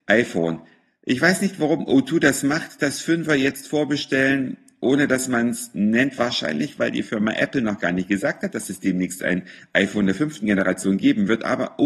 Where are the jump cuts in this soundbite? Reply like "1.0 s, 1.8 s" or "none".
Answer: none